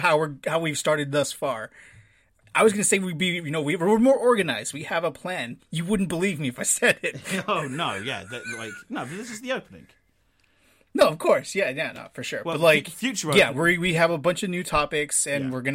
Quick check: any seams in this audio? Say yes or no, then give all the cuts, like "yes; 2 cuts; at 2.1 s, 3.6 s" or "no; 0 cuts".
yes; 1 cut; at 5.6 s